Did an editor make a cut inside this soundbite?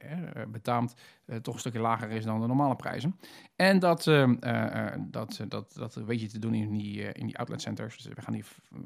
yes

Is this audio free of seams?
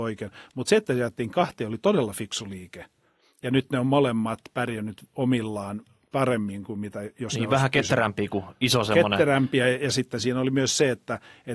yes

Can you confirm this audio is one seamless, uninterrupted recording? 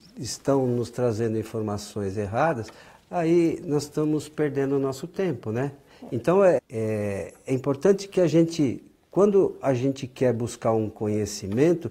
no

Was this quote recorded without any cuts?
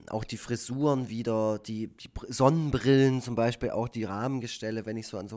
yes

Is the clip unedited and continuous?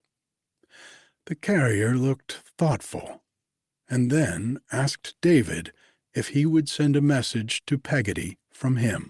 yes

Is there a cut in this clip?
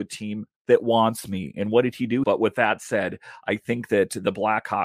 yes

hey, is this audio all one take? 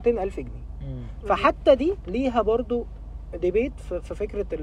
no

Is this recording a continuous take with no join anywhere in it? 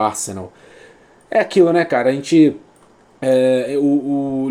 yes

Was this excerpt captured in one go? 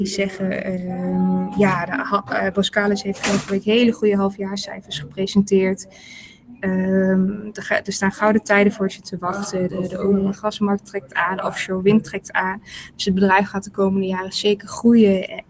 no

